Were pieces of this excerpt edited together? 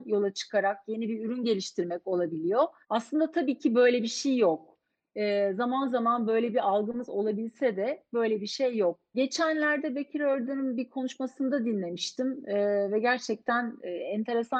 yes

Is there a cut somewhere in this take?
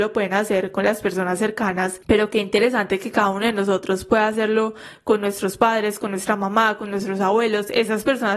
no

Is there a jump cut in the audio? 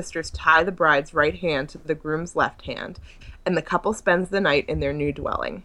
no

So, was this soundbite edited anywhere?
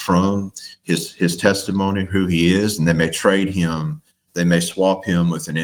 no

